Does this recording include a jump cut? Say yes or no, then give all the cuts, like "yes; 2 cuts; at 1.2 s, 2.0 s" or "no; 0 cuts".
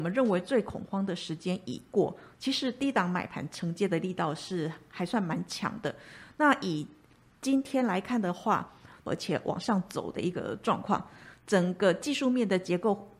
yes; 2 cuts; at 2.3 s, 9.1 s